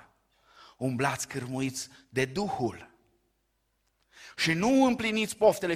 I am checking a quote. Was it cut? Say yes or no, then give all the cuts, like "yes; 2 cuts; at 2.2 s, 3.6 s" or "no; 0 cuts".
no; 0 cuts